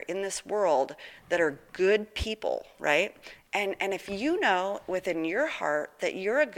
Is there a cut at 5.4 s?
no; 1 cut; at 3.4 s

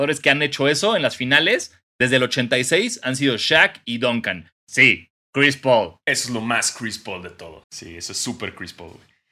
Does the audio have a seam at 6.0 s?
yes; 3 cuts; at 4.5 s, 6.0 s, 7.6 s

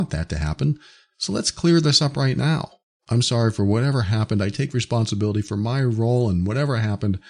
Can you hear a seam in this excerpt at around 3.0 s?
yes; 1 cut; at 3.0 s

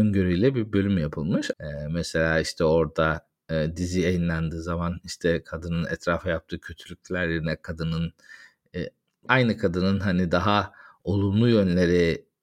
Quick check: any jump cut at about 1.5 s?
yes; 2 cuts; at 1.5 s, 9.3 s

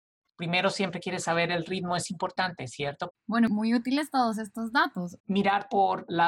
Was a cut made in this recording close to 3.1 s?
yes; 2 cuts; at 3.1 s, 5.2 s

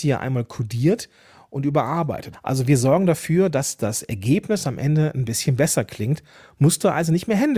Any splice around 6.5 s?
no; 1 cut; at 2.3 s

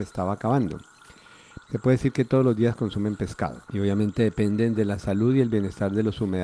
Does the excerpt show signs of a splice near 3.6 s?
yes; 2 cuts; at 1.6 s, 3.6 s

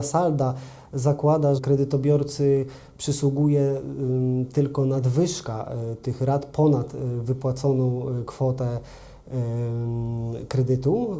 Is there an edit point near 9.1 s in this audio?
no; 1 cut; at 1.6 s

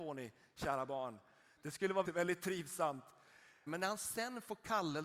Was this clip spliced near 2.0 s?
yes; 2 cuts; at 2.0 s, 3.7 s

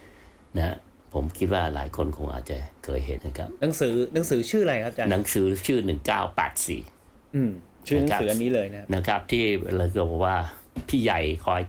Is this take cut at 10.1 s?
no; 1 cut; at 3.2 s

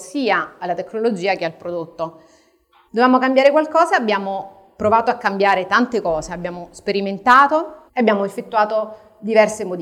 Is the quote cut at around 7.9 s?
yes; 2 cuts; at 2.9 s, 7.9 s

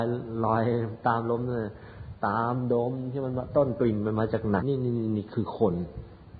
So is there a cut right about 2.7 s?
no; 1 cut; at 4.6 s

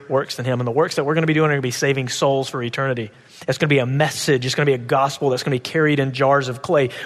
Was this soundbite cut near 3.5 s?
no; 0 cuts

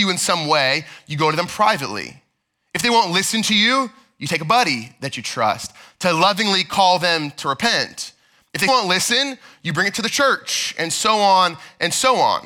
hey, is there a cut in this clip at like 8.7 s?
yes; 1 cut; at 8.7 s

